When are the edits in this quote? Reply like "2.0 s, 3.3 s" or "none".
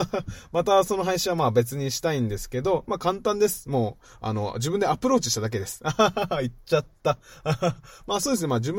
none